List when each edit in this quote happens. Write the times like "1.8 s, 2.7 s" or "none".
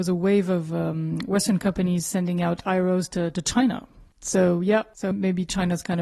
4.1 s, 5.1 s